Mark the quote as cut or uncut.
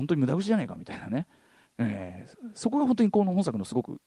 cut